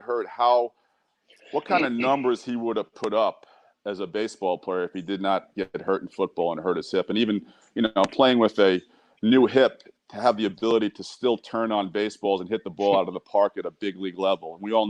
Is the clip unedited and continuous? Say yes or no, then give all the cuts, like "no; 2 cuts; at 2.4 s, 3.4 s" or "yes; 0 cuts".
yes; 0 cuts